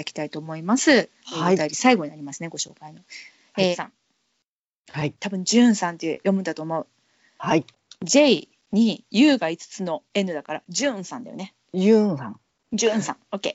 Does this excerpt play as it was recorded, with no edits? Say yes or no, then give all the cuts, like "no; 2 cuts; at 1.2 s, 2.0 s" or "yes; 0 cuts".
no; 2 cuts; at 3.7 s, 5.2 s